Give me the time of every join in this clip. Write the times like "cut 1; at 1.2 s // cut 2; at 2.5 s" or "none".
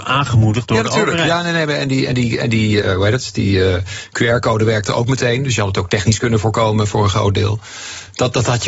cut 1; at 2.8 s